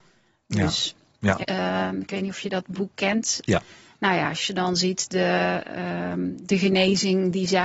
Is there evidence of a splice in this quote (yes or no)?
yes